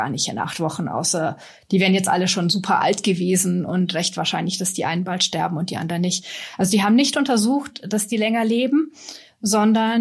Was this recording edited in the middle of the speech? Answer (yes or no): no